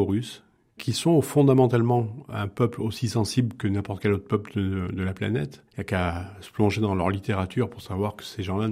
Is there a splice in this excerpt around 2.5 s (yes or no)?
no